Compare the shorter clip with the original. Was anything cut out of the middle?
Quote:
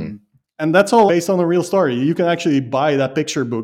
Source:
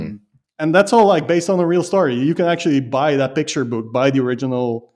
yes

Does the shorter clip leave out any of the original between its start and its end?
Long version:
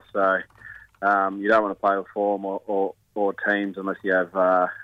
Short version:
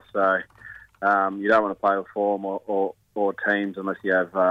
no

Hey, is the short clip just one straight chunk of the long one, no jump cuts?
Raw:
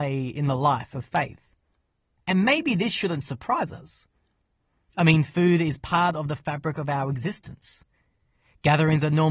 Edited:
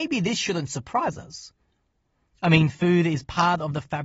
yes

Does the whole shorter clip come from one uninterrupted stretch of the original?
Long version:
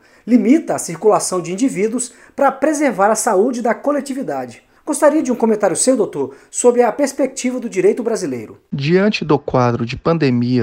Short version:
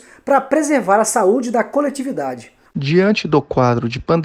no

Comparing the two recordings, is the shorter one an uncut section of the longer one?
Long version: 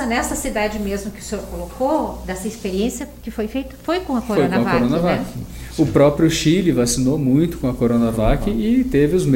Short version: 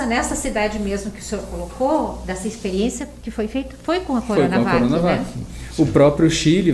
yes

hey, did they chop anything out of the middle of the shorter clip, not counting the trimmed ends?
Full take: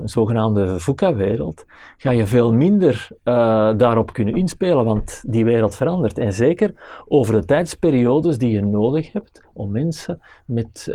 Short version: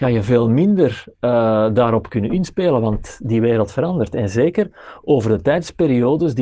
no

